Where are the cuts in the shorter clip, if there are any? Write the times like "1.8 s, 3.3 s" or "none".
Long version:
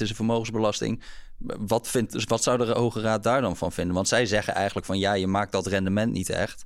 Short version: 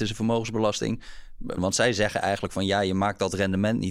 1.6 s